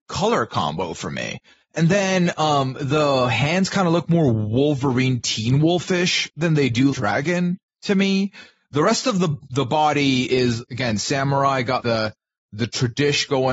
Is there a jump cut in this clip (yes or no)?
yes